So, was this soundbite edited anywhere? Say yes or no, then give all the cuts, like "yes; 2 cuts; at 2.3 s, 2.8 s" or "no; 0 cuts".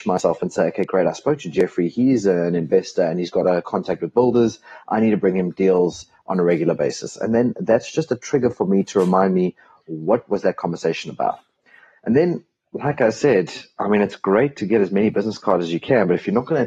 no; 0 cuts